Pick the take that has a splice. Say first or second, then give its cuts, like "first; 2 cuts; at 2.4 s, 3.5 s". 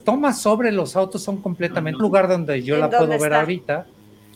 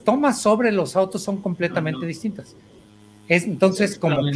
first; 1 cut; at 2.0 s